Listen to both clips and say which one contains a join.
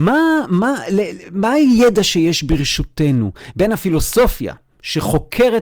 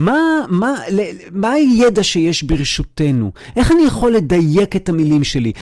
first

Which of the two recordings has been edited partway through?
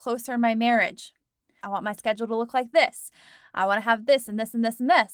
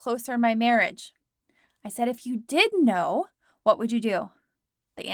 first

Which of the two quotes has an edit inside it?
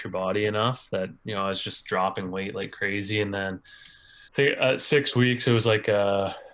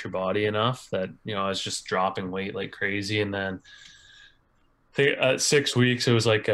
first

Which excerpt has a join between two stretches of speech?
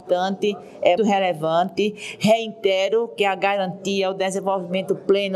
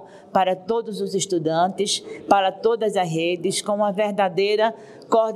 first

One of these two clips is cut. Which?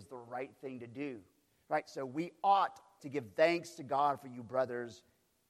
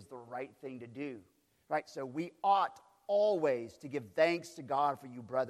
first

